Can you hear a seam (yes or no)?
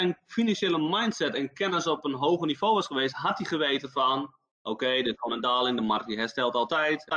no